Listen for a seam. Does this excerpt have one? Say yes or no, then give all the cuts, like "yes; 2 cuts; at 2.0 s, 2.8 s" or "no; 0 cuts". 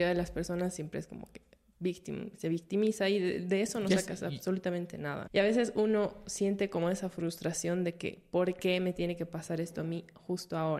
yes; 1 cut; at 5.3 s